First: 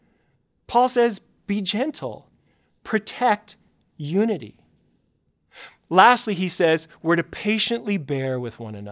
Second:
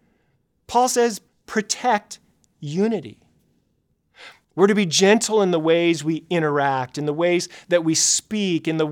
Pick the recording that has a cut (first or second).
second